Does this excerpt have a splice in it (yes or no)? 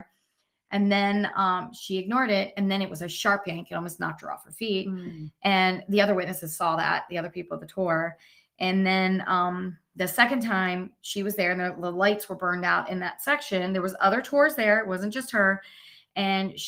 no